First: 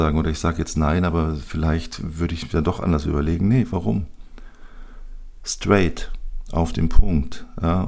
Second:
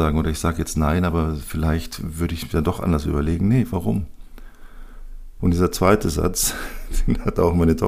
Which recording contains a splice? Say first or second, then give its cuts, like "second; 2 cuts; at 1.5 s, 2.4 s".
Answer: second; 1 cut; at 5.4 s